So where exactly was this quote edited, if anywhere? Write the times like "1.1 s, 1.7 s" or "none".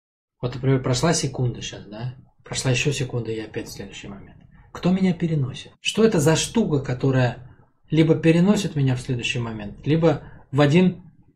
2.4 s, 5.7 s